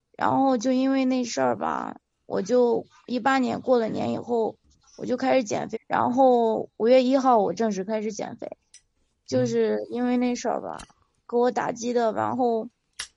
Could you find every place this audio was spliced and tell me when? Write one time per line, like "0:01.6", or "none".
0:05.7